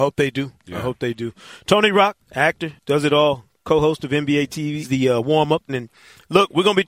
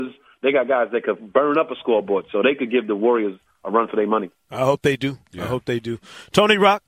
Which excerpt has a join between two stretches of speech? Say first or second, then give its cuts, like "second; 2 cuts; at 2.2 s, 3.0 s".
first; 2 cuts; at 2.2 s, 5.7 s